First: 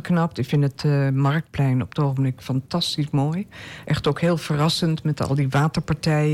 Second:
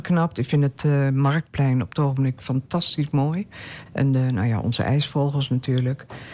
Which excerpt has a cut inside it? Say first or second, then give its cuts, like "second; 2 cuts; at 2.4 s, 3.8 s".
second; 1 cut; at 3.9 s